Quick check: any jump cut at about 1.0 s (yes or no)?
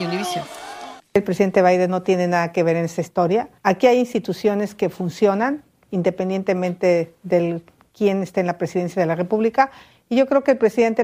yes